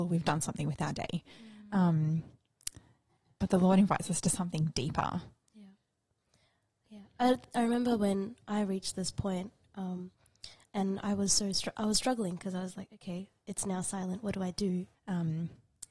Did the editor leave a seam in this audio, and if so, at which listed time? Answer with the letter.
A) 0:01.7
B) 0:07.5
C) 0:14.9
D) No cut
C